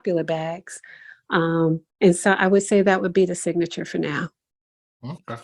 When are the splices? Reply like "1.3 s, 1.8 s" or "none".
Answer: 1.9 s